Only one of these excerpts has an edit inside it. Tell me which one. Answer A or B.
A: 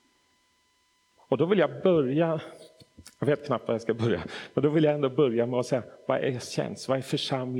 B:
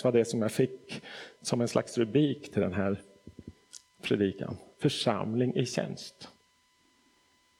B